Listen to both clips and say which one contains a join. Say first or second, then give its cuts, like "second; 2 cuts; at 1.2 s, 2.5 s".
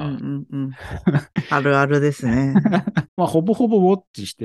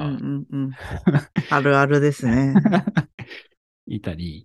first; 1 cut; at 3.1 s